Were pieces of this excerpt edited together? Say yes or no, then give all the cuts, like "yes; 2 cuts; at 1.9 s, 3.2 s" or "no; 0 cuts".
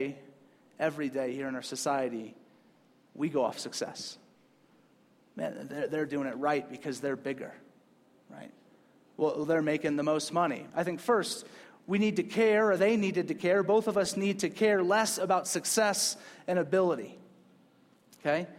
yes; 1 cut; at 10.7 s